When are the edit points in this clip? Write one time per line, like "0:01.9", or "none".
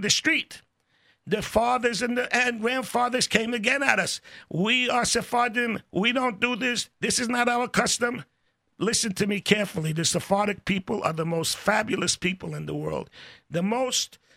none

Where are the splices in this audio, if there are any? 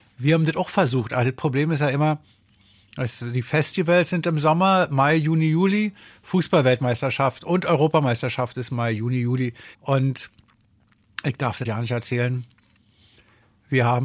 0:09.7
0:11.7

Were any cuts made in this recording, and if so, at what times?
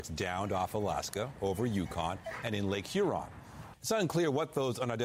0:03.7

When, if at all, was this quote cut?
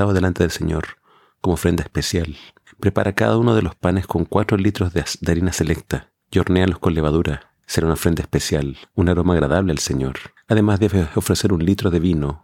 0:07.6

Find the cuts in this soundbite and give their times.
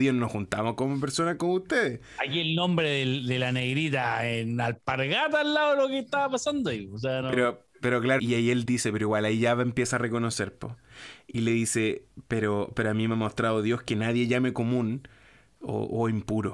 0:08.2

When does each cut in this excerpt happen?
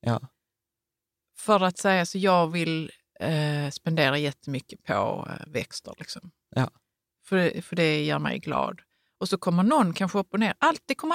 none

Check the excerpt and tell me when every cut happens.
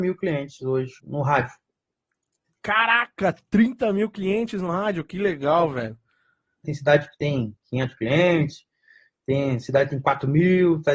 0:01.0
0:06.6

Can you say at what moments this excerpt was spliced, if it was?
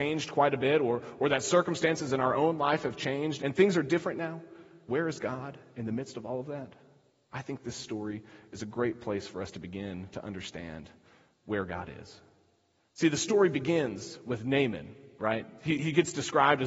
0:03.4
0:04.9

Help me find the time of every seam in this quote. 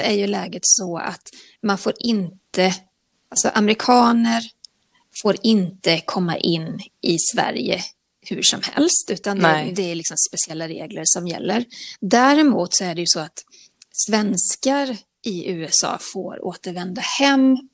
none

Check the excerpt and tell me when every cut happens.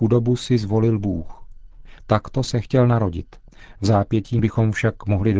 none

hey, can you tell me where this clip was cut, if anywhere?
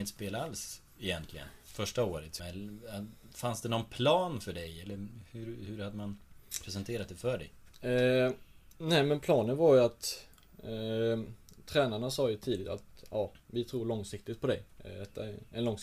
0:02.4

